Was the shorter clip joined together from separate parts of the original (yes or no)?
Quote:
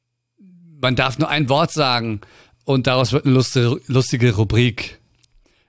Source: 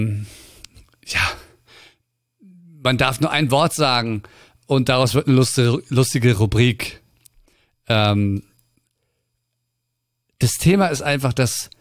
no